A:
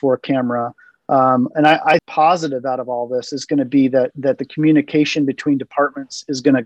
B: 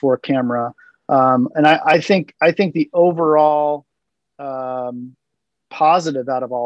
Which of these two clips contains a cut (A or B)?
A